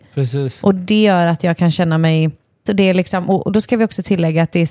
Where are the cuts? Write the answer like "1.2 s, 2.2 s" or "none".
2.7 s